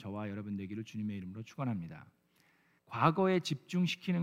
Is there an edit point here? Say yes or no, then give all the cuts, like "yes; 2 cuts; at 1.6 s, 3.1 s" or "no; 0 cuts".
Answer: yes; 1 cut; at 2.8 s